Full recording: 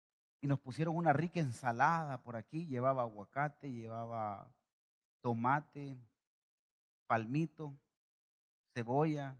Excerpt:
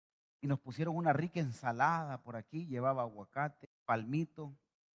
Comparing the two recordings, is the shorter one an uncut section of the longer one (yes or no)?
no